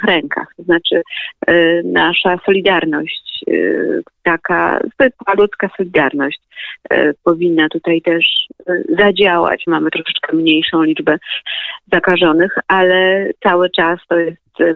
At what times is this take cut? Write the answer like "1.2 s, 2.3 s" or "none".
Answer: 9.7 s